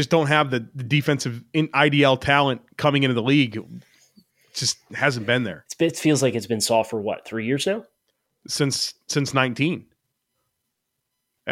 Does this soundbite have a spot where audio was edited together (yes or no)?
no